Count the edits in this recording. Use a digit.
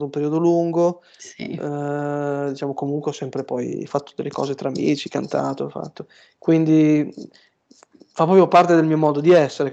0